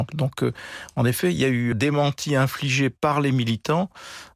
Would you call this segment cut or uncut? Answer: cut